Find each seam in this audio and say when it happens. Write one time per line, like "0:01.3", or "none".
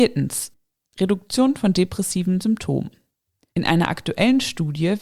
none